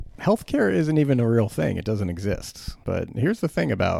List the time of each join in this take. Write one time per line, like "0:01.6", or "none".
0:02.8